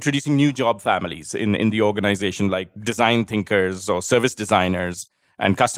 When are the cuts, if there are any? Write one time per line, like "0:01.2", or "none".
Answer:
none